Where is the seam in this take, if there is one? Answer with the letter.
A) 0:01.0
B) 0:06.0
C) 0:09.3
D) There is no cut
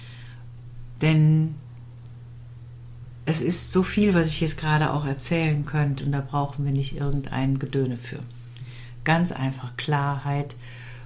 B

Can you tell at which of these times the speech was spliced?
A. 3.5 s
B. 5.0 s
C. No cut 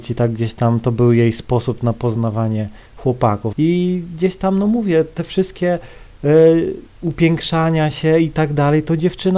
A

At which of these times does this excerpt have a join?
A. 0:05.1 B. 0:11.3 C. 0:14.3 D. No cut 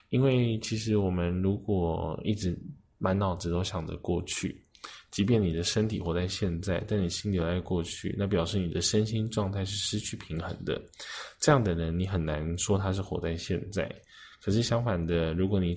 D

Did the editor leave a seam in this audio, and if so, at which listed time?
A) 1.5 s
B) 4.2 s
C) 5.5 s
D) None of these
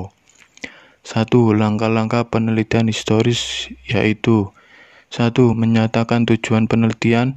C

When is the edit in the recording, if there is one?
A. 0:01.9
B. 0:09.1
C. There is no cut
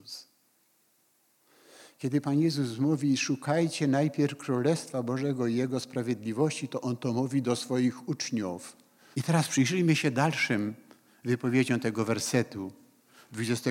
B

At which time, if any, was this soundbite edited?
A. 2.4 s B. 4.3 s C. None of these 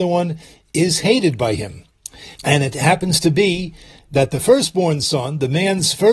A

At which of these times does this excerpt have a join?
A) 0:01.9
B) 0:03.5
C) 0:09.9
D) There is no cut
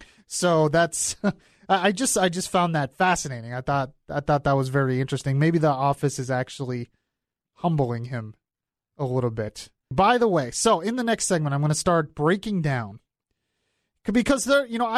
C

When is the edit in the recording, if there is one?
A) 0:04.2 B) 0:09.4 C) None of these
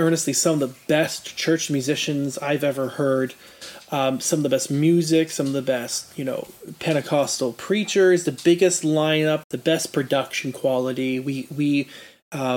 B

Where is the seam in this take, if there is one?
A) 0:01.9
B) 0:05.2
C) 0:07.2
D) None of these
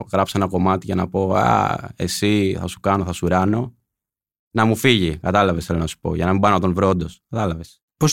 C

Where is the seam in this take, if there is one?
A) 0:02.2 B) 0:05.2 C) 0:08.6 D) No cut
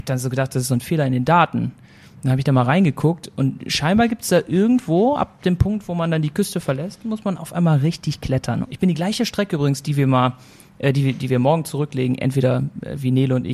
C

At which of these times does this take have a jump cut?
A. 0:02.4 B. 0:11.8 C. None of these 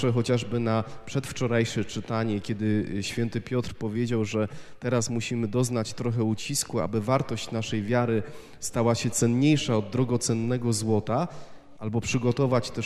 B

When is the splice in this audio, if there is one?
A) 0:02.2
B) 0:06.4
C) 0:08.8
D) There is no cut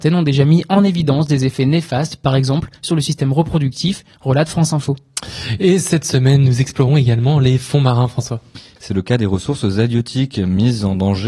C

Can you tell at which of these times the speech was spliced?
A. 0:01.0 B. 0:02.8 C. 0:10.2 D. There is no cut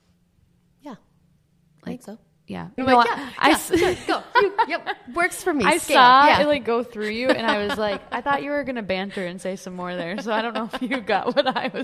B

